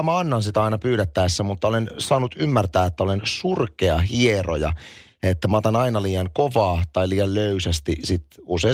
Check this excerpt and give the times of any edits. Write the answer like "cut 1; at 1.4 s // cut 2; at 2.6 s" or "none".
none